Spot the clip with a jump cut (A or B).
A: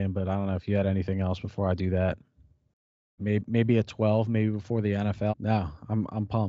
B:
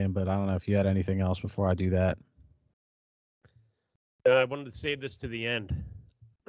A